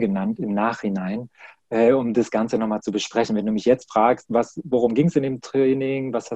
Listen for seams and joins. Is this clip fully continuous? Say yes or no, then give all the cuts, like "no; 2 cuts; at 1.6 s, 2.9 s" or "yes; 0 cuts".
yes; 0 cuts